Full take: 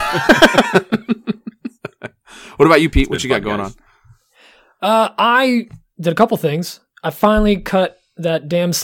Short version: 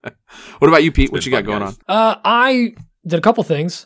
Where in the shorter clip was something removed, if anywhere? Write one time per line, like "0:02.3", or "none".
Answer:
0:01.8